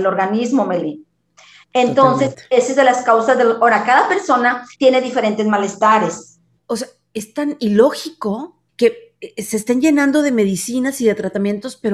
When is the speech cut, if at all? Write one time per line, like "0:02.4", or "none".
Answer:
0:04.7
0:06.6
0:08.7